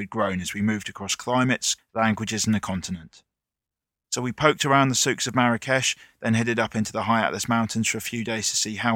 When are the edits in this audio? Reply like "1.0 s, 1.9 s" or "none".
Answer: 1.8 s, 3.9 s